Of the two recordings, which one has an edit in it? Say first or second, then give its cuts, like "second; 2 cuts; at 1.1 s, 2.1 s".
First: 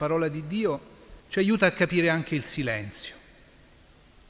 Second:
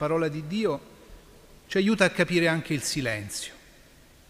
first; 1 cut; at 1.2 s